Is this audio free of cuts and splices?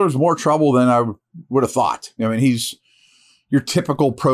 yes; 0 cuts

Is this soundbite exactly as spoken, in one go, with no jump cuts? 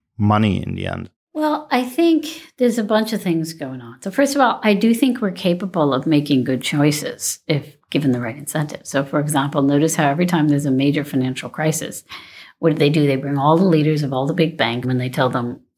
no; 1 cut; at 14.8 s

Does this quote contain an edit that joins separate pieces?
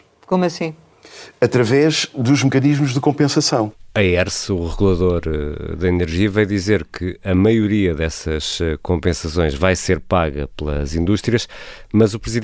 no; 0 cuts

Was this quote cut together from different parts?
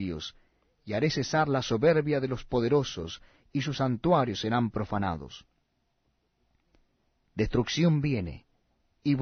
no; 0 cuts

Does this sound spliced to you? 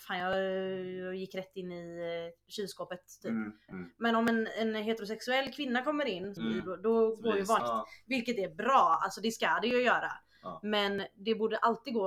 yes; 3 cuts; at 3.7 s, 6.4 s, 7.6 s

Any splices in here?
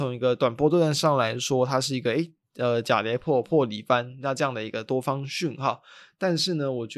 no; 0 cuts

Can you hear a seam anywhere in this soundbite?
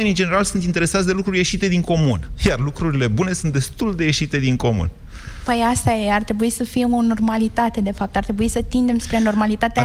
no; 0 cuts

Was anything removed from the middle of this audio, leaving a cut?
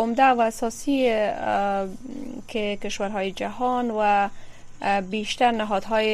no; 0 cuts

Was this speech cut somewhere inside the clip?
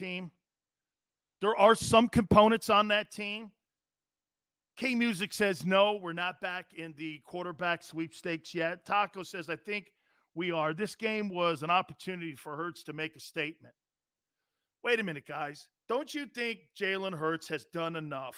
no; 0 cuts

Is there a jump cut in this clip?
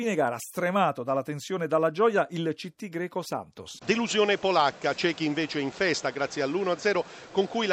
yes; 1 cut; at 3.8 s

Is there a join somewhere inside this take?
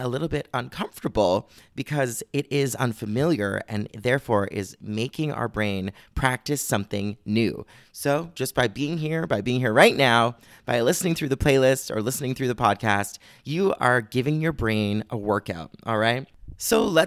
no; 0 cuts

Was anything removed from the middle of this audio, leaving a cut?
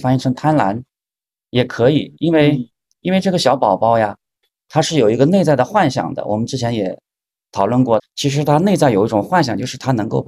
yes; 1 cut; at 8.0 s

